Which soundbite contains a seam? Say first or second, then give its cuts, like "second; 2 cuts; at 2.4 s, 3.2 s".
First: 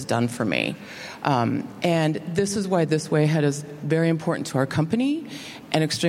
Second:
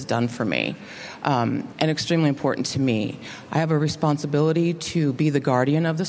second; 1 cut; at 1.7 s